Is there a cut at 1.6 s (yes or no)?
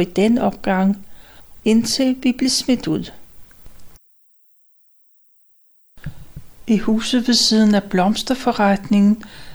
yes